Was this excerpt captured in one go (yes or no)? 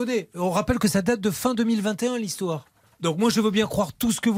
yes